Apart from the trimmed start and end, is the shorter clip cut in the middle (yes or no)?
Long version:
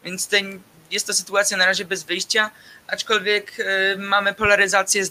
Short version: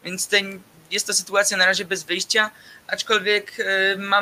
no